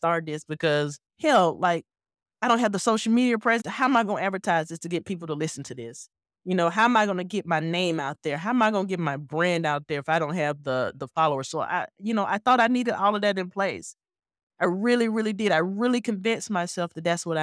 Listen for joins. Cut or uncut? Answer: cut